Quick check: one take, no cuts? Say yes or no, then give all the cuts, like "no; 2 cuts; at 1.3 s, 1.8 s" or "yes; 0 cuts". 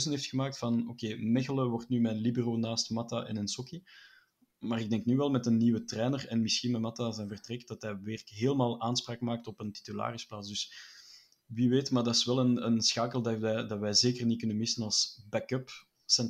yes; 0 cuts